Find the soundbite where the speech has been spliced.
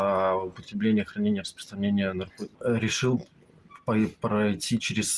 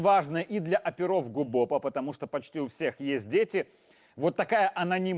first; 1 cut; at 2.5 s

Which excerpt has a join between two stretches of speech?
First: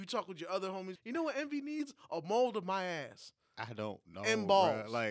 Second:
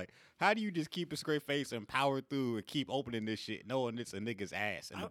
first; 1 cut; at 1.0 s

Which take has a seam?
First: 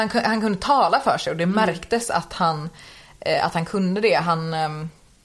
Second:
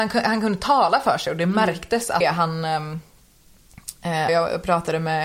second; 2 cuts; at 2.2 s, 4.3 s

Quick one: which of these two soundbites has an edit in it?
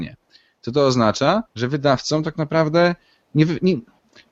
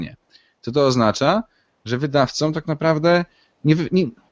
first; 1 cut; at 1.5 s

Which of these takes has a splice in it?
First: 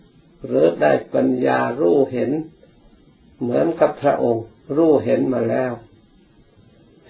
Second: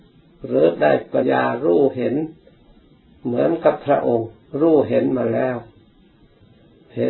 second; 1 cut; at 1.2 s

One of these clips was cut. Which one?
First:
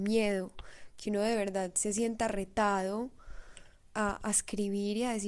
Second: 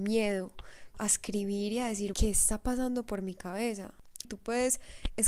second; 3 cuts; at 0.9 s, 2.1 s, 4.2 s

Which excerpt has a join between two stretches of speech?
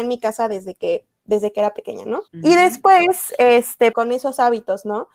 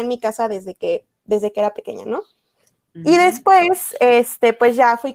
first; 2 cuts; at 2.3 s, 3.9 s

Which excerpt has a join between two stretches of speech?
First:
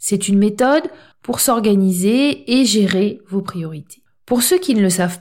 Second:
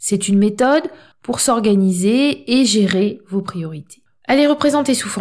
second; 1 cut; at 4.2 s

